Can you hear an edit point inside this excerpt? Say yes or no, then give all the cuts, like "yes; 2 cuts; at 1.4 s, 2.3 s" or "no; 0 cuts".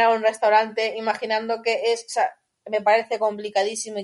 no; 0 cuts